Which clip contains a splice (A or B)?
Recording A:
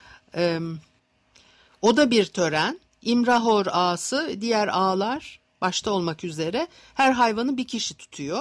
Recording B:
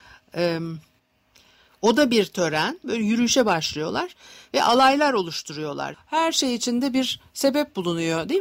B